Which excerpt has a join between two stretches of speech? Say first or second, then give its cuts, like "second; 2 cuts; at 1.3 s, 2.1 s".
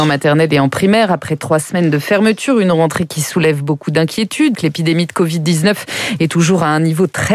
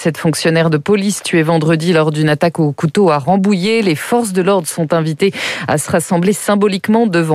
first; 1 cut; at 4.5 s